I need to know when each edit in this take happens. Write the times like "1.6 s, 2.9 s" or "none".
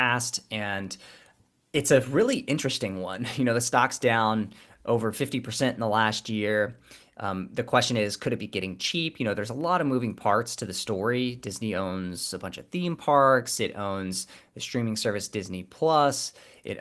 none